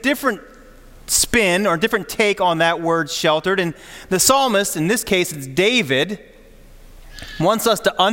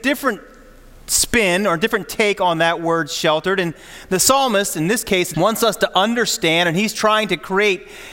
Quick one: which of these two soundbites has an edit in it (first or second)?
second